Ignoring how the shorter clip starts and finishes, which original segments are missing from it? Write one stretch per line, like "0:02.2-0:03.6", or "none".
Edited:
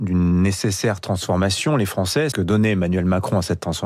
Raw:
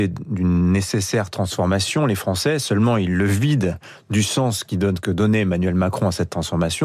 0:02.6-0:05.0